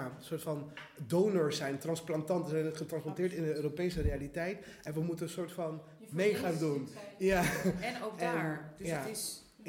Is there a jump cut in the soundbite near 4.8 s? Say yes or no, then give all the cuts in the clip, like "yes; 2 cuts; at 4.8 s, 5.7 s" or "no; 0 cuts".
no; 0 cuts